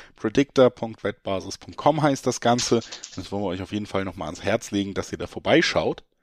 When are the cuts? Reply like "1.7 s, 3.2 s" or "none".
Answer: none